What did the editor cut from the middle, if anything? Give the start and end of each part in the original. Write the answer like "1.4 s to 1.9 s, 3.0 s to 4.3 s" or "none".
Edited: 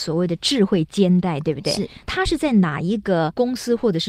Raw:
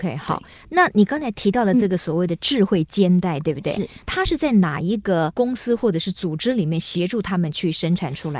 none